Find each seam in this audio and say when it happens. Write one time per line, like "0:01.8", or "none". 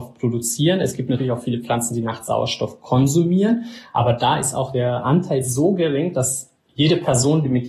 none